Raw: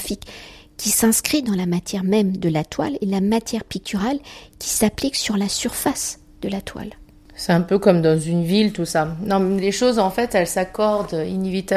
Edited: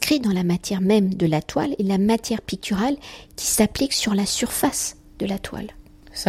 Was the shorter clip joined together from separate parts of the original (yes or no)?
no